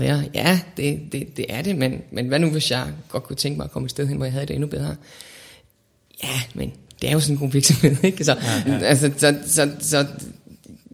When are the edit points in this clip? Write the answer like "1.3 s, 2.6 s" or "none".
8.7 s